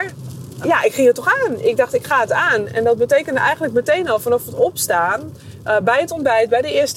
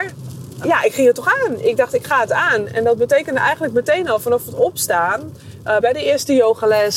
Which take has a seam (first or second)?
second